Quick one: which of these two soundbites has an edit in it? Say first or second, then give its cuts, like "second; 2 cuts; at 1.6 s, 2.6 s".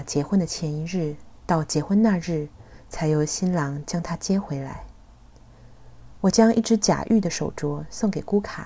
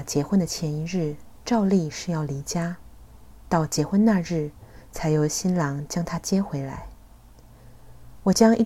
first; 1 cut; at 1.4 s